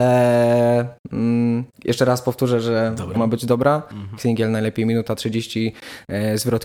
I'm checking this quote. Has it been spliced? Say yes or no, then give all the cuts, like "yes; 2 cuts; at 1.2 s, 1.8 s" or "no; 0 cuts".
yes; 3 cuts; at 1.7 s, 3.1 s, 4.2 s